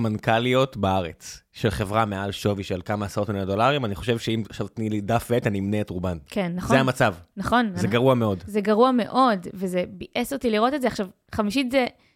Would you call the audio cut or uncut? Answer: uncut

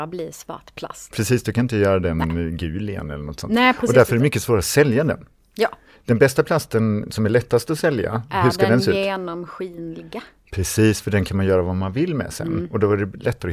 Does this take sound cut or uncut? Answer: uncut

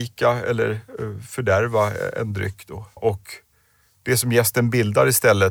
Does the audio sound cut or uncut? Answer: cut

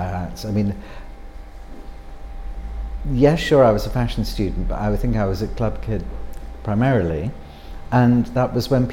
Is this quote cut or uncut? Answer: uncut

